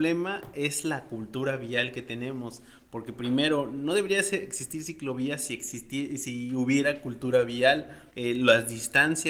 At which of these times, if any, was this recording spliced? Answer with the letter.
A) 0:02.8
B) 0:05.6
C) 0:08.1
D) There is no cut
C